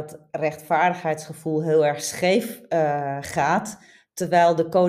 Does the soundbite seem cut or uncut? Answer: uncut